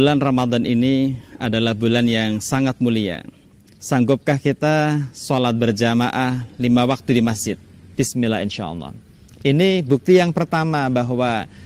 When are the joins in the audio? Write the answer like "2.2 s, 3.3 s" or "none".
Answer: 3.7 s, 7.9 s